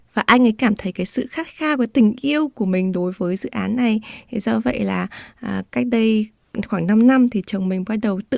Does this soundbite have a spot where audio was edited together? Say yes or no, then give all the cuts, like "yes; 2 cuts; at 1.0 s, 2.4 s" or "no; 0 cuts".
no; 0 cuts